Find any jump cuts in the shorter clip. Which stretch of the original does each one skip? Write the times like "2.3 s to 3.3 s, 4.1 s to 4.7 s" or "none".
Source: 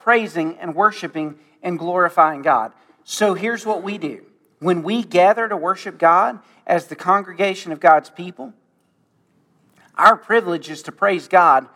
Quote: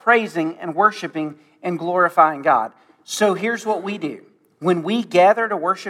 none